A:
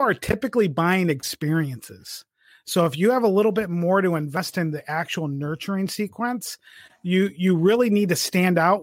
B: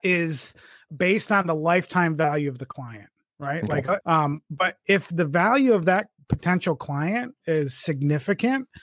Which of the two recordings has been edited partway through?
B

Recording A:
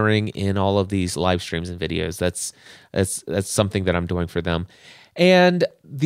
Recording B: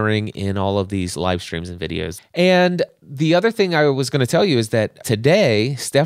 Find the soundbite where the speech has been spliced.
B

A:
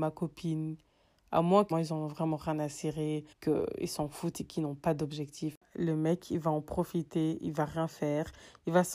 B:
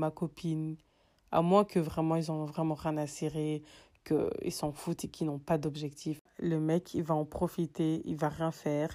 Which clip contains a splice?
A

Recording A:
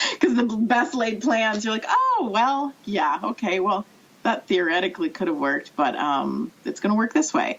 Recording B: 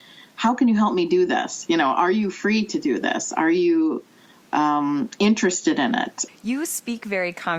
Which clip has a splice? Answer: B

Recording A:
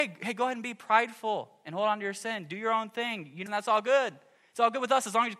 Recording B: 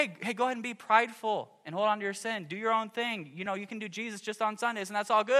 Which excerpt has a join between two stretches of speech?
A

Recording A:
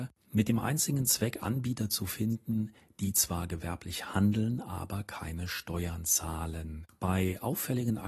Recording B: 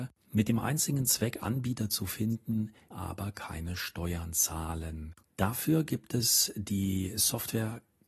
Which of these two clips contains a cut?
B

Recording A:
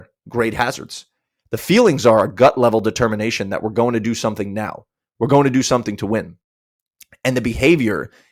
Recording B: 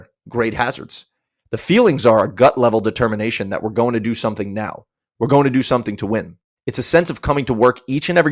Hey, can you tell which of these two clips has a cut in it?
B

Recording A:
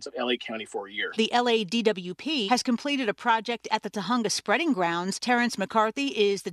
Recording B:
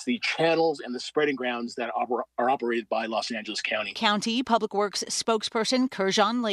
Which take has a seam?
A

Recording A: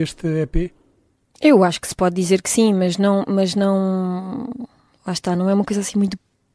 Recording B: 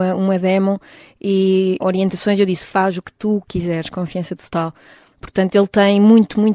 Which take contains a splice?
B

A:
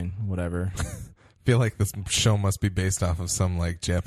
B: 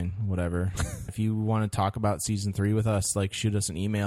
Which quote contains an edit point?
B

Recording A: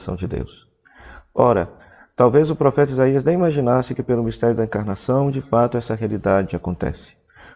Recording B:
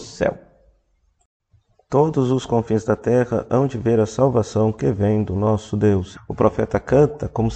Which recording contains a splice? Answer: B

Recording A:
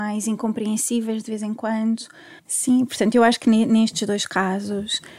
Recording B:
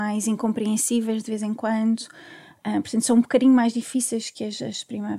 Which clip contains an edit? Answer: A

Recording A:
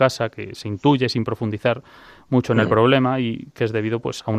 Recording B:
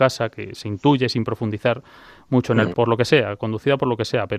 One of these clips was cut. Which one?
B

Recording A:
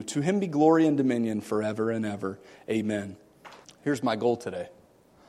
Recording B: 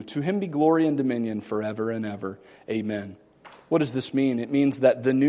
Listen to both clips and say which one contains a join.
A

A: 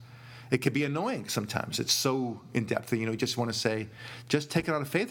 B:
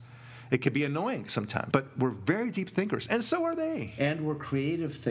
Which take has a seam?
B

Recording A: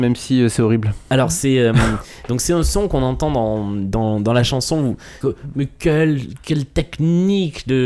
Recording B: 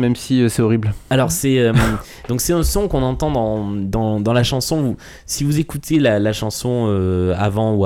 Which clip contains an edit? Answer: A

